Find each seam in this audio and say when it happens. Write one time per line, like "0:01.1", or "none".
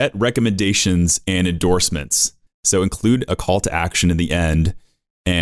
0:02.5

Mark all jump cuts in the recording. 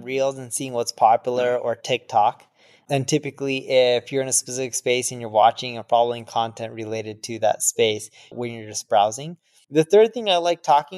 0:08.3
0:09.6

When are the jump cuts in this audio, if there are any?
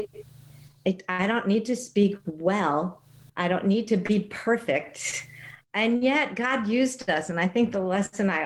0:03.3
0:05.6

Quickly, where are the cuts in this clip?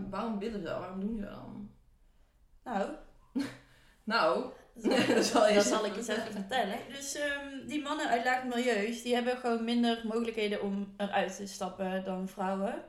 none

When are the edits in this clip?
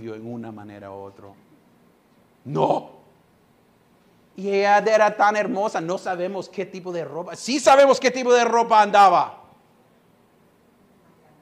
none

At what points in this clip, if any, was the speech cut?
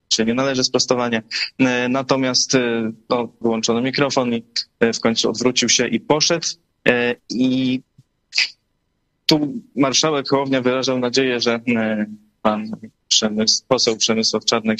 0:03.4

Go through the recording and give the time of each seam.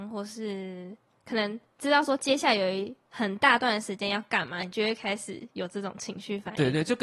none

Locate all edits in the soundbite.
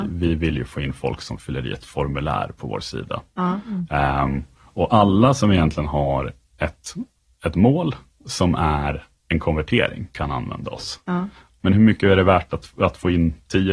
0:11.6

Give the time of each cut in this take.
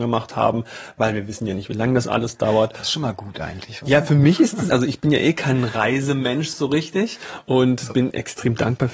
none

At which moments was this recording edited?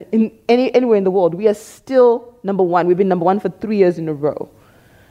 none

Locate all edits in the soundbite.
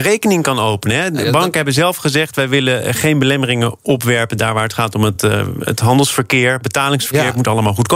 none

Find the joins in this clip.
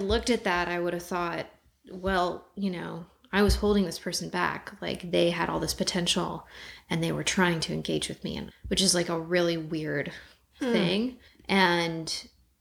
0:08.5
0:11.3

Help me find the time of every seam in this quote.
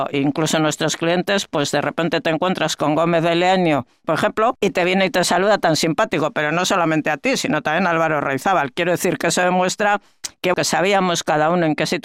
0:04.0
0:10.5

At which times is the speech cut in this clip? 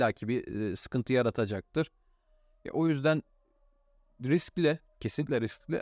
none

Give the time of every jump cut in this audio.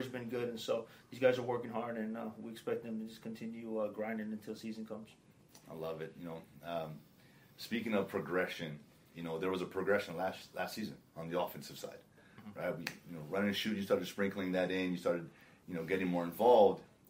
none

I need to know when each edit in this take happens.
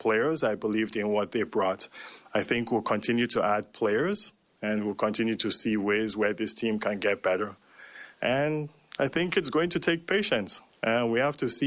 0:02.2

